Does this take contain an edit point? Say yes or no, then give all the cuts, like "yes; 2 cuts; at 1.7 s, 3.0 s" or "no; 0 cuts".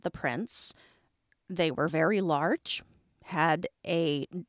no; 0 cuts